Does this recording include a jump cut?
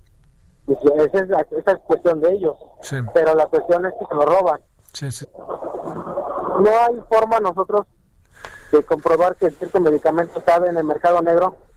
yes; 1 cut; at 5.2 s

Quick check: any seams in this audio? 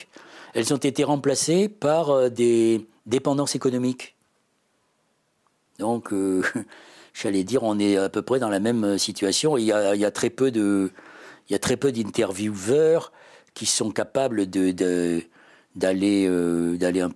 no; 0 cuts

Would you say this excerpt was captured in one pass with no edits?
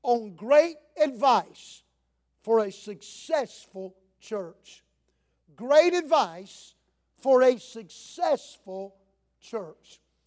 yes; 0 cuts

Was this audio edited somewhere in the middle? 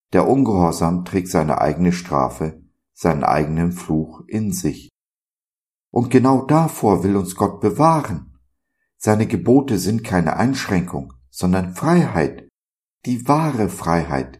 no; 0 cuts

